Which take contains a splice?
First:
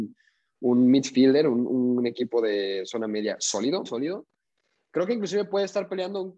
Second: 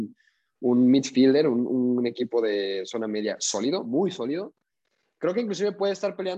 first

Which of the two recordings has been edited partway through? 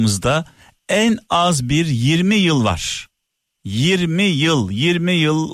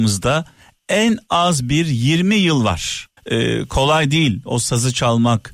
second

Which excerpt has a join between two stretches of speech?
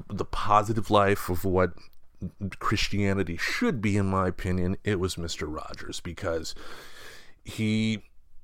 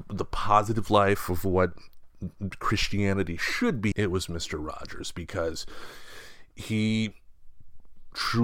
second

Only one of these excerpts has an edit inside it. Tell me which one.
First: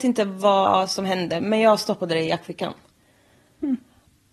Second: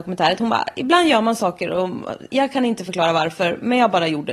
second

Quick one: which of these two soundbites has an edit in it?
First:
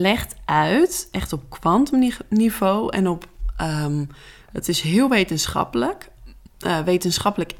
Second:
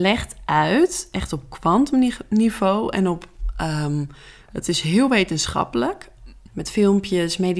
second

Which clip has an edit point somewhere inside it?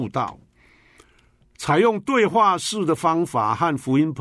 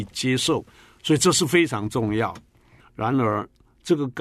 second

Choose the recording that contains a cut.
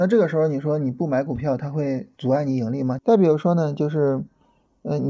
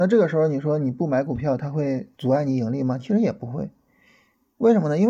first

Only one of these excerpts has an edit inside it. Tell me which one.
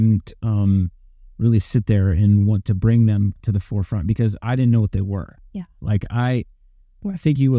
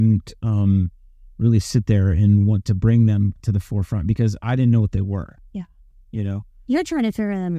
first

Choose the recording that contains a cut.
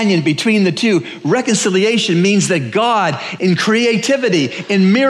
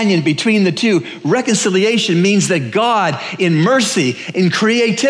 first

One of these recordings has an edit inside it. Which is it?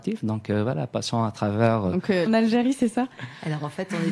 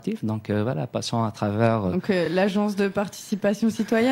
first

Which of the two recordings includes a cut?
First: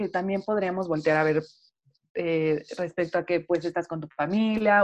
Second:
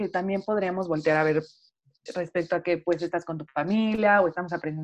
second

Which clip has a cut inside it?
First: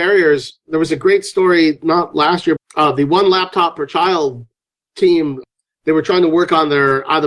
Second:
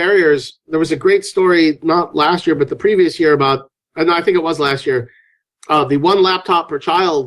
first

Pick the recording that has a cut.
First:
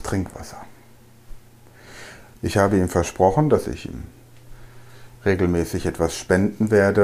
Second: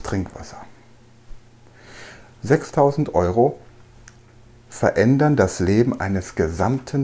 first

